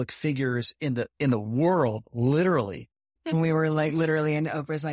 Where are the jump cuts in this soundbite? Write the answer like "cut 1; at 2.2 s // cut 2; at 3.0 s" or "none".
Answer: cut 1; at 3.2 s